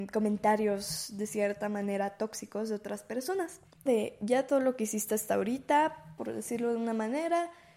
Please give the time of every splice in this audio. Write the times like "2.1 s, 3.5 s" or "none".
3.9 s, 6.2 s

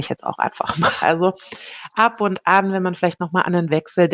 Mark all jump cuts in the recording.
1.0 s

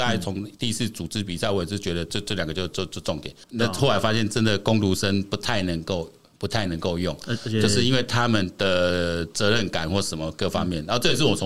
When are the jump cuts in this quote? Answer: 3.4 s

